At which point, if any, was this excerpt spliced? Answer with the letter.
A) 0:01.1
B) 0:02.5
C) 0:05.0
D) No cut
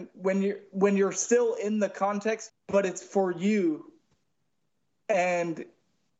B